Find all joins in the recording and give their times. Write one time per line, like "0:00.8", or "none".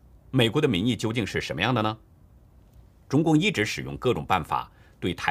0:03.0